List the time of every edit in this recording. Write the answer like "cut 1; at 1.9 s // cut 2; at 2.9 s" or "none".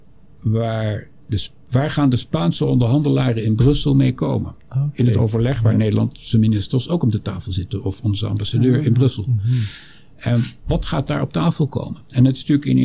cut 1; at 1.2 s